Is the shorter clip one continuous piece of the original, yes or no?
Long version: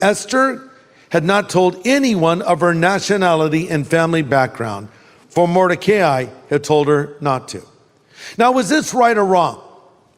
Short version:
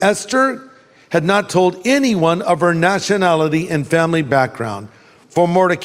yes